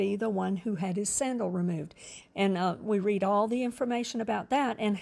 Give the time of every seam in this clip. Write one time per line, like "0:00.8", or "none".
0:02.2